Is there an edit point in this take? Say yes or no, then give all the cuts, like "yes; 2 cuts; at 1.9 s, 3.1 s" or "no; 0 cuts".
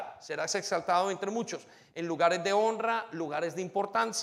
no; 0 cuts